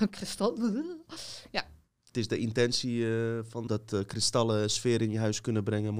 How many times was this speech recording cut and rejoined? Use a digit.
1